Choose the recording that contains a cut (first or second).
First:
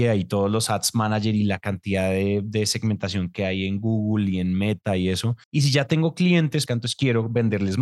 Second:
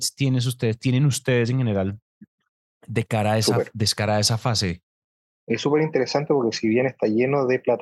first